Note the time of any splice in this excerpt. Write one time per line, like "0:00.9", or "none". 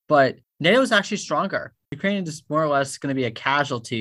0:01.8